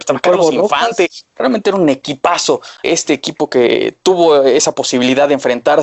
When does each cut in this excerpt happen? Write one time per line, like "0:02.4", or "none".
0:01.4
0:02.8

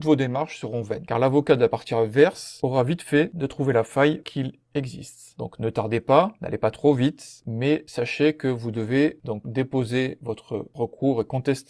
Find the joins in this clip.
0:05.4
0:07.4

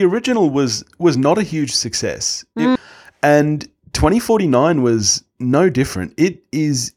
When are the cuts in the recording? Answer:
0:02.8

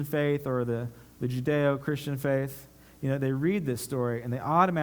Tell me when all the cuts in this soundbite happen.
none

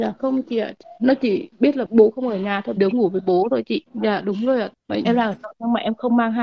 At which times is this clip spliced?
0:02.8
0:03.9
0:05.0

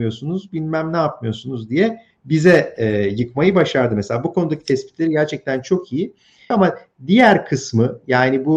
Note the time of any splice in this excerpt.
0:06.5

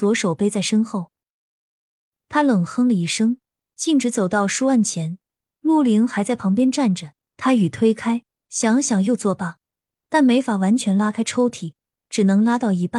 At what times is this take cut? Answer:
none

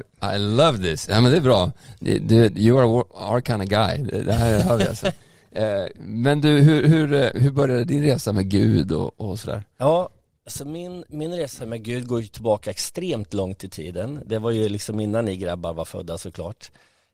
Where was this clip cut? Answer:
none

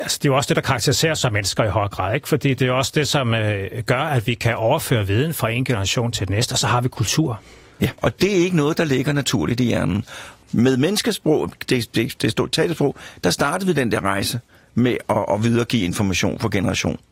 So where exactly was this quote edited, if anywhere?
0:08.0
0:10.4

